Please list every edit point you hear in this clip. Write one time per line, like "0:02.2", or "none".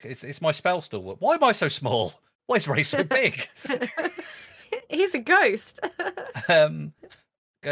none